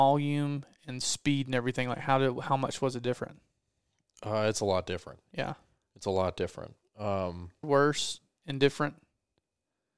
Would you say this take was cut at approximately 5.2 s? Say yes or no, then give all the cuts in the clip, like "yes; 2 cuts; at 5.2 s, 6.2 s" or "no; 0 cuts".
no; 1 cut; at 7.6 s